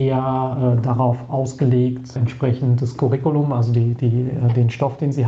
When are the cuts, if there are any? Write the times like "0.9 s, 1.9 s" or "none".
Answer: none